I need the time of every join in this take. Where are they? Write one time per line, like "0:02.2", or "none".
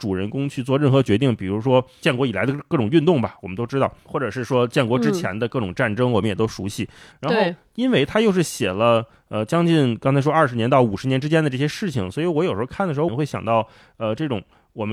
0:07.1
0:13.1